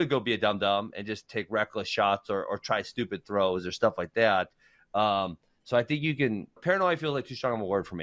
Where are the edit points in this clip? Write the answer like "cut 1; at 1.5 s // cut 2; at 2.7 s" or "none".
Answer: cut 1; at 6.6 s